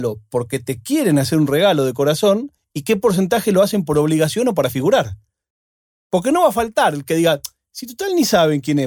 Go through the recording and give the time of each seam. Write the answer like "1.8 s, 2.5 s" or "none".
6.0 s